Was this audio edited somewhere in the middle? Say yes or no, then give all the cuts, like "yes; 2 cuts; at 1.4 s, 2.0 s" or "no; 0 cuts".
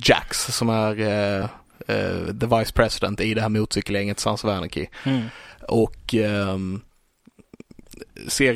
no; 0 cuts